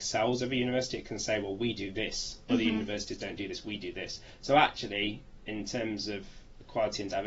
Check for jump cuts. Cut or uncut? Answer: uncut